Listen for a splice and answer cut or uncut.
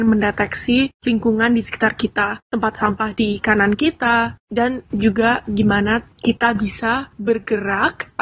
cut